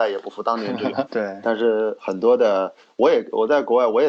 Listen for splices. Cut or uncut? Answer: cut